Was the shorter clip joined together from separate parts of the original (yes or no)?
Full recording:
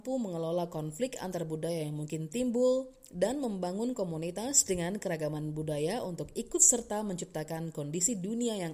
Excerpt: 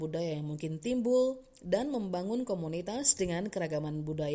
no